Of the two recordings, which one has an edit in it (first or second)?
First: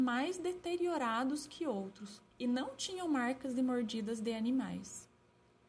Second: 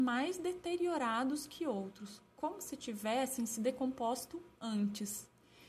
first